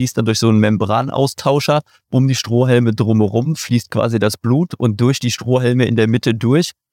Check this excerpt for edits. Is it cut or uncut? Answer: cut